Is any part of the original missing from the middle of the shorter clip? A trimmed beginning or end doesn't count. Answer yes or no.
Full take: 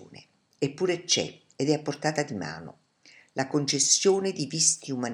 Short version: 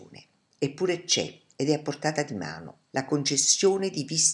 yes